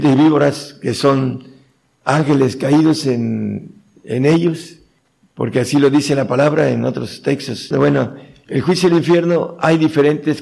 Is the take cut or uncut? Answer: cut